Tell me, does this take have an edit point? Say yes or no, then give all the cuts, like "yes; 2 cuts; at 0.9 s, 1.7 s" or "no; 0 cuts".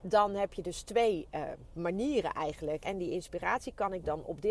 yes; 1 cut; at 2.8 s